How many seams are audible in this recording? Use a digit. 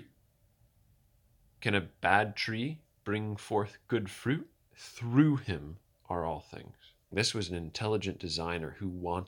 2